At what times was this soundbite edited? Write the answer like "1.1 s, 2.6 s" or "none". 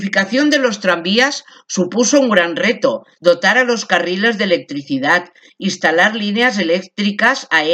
3.2 s